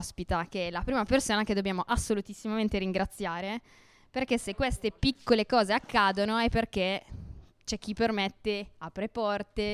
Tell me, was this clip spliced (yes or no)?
yes